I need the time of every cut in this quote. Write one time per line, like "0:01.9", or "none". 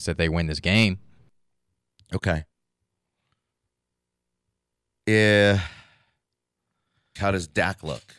0:07.2